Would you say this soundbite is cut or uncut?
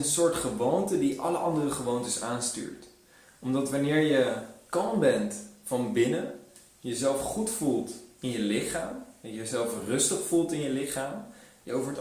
uncut